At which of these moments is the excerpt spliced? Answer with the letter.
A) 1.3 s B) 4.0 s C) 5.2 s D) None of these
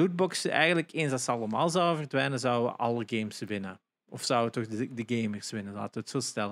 D